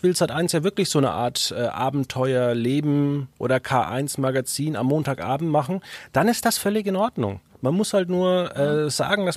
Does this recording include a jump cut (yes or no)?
no